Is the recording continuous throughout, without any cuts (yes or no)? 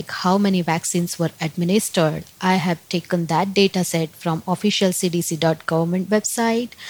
yes